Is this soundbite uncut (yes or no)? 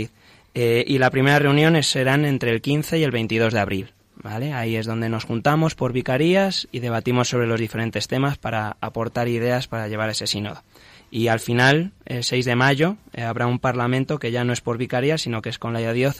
yes